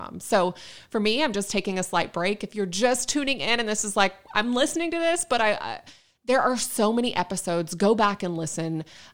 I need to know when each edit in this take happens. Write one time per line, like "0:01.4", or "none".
none